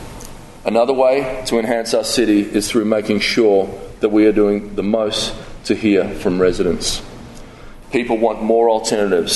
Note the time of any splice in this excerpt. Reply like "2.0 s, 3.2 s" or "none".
7.8 s